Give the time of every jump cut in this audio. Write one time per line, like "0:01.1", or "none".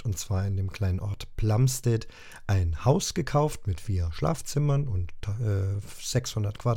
none

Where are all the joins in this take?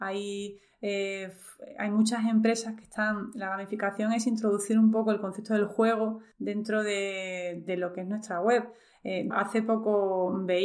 0:06.3
0:09.3

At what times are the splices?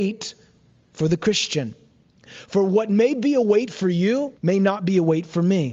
0:02.3
0:04.4

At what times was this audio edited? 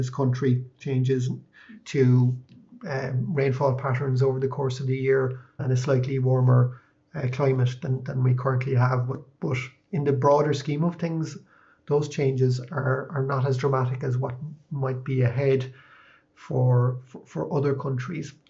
0:05.6

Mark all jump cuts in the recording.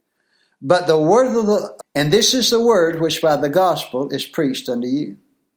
0:01.8

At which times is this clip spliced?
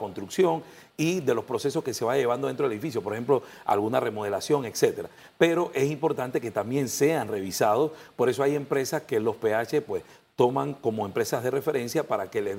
none

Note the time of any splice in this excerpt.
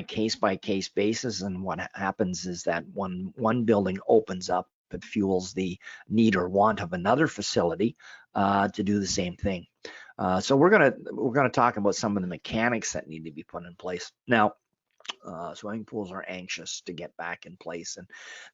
0:15.2

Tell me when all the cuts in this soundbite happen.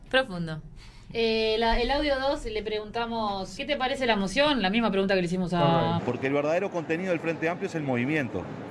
0:03.6
0:06.0

